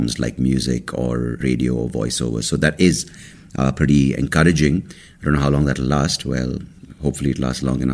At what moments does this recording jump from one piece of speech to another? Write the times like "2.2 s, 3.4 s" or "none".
1.4 s